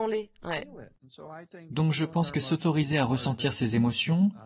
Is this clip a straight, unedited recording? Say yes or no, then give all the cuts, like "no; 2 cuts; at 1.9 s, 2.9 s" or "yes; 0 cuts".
yes; 0 cuts